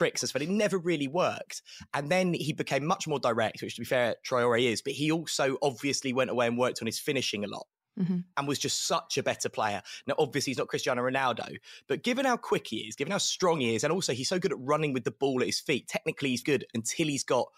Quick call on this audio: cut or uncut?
cut